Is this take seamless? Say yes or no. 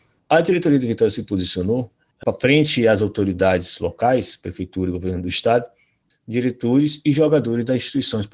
no